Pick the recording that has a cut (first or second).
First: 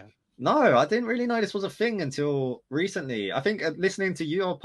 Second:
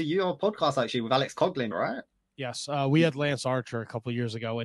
second